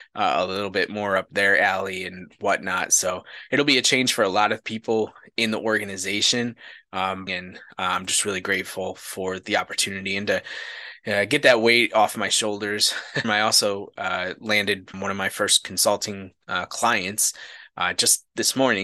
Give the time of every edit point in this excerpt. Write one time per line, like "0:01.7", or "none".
0:07.3
0:13.2
0:14.9